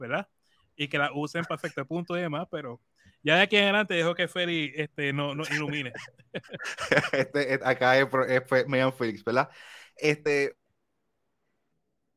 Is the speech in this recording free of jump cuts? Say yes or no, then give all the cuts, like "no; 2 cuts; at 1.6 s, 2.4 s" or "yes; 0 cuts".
yes; 0 cuts